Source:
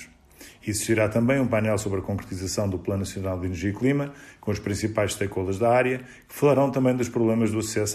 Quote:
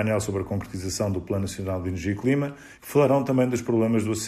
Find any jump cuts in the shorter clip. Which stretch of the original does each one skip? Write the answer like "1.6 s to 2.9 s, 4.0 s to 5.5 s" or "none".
4.4 s to 6.2 s